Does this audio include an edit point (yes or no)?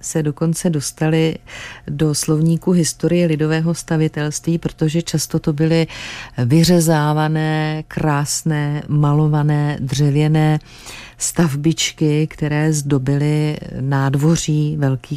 no